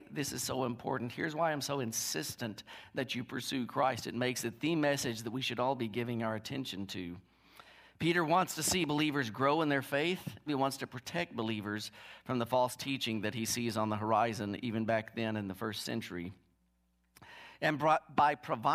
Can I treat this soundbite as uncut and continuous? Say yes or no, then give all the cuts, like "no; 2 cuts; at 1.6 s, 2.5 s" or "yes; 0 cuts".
no; 2 cuts; at 4.0 s, 10.5 s